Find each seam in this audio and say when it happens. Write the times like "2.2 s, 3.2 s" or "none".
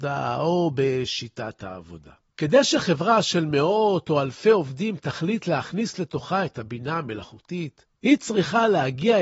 none